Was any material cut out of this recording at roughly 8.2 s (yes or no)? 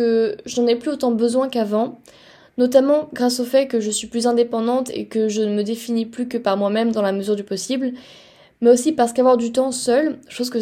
no